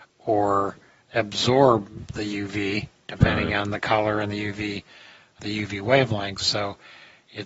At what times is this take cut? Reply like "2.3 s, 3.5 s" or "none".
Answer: 5.4 s